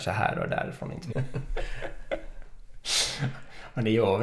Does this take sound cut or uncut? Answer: cut